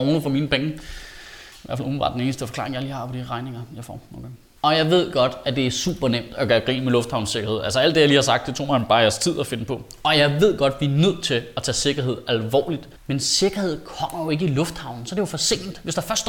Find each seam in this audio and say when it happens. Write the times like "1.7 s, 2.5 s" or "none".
13.0 s